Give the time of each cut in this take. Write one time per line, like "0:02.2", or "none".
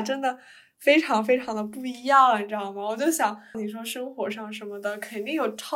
0:03.5